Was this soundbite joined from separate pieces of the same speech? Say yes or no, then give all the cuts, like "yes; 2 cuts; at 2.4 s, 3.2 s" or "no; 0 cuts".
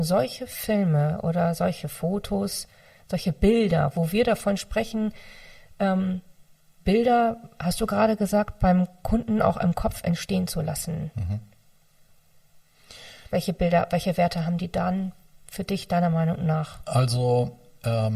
no; 0 cuts